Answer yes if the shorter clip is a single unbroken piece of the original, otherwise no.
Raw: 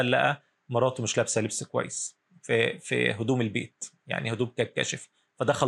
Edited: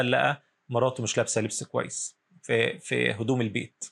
yes